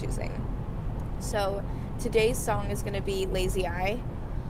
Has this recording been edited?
no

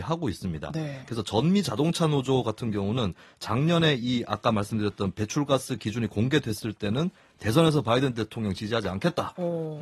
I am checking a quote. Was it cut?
no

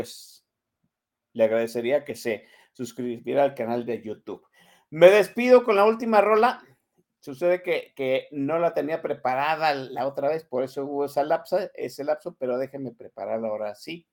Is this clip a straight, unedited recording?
yes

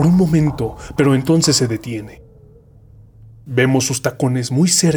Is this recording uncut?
no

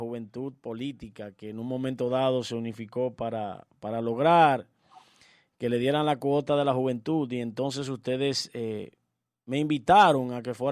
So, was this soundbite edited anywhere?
no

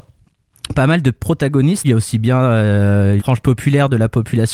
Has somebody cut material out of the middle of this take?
yes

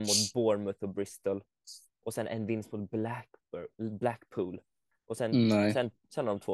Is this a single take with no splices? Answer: no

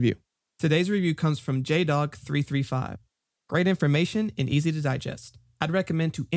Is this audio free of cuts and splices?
yes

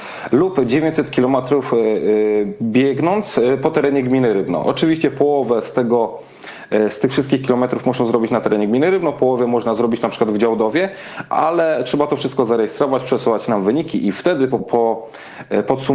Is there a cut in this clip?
yes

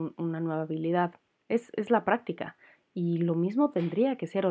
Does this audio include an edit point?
no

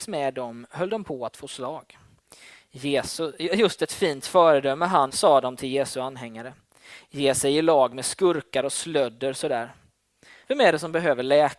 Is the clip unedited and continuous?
no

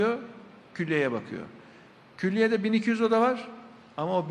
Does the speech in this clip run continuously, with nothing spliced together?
yes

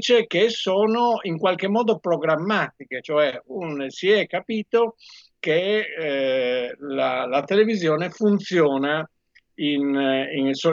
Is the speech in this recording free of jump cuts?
yes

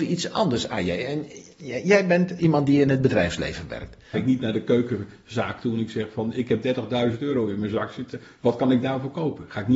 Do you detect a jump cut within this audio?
yes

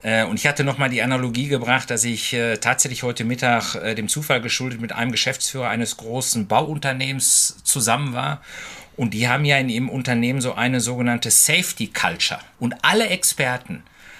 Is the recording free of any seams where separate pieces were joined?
no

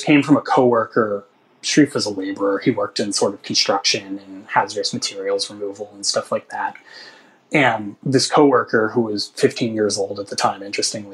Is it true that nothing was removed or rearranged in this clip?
yes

